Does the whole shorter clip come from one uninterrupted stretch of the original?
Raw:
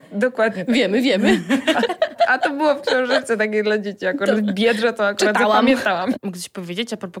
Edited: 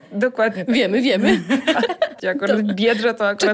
no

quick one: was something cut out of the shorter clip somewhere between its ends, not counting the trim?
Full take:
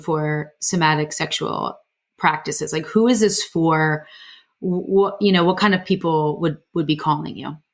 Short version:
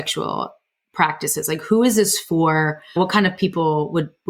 yes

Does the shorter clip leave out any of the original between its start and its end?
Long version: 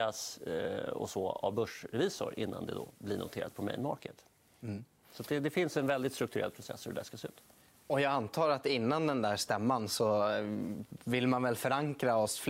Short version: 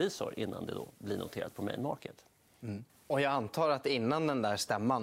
yes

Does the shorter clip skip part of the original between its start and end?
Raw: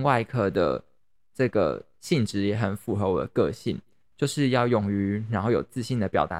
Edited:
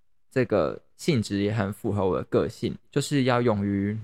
yes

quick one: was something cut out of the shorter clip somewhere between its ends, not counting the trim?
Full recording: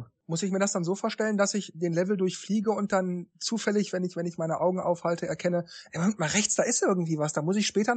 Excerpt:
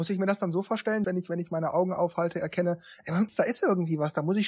yes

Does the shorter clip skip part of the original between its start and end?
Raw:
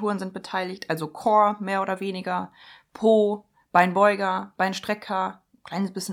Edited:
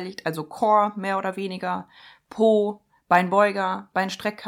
no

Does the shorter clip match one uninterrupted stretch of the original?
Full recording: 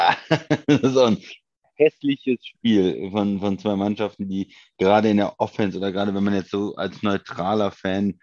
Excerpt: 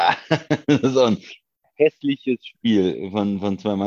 yes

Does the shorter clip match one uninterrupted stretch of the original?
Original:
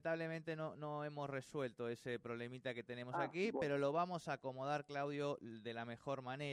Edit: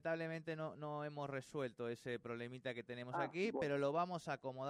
yes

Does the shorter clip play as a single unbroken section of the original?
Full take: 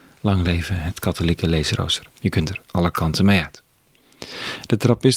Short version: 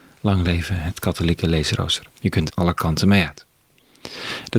no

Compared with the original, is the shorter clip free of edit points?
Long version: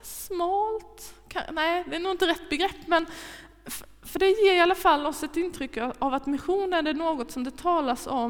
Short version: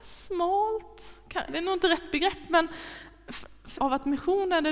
no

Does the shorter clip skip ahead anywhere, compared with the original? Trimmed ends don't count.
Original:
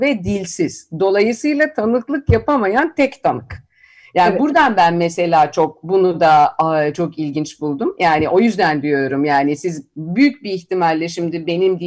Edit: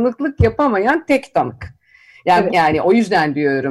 yes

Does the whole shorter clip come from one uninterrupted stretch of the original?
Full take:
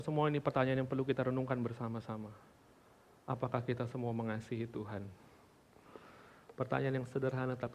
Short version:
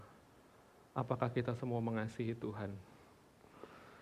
yes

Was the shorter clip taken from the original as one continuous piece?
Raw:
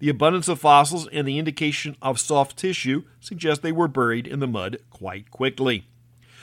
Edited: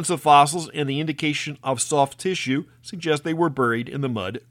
yes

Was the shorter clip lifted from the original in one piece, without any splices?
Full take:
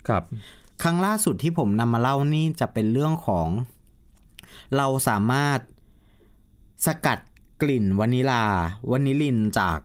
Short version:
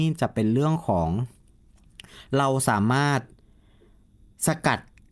yes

